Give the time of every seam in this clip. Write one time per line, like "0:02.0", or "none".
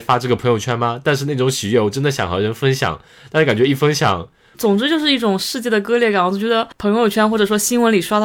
0:04.5